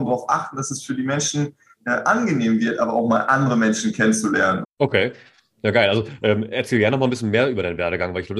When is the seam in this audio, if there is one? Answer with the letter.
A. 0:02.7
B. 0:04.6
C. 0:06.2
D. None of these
B